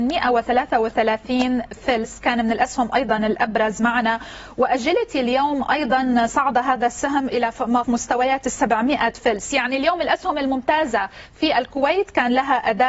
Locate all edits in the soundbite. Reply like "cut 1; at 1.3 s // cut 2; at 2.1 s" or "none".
cut 1; at 7.8 s